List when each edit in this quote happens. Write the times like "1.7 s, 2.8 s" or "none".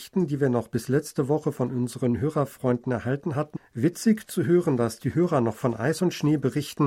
3.6 s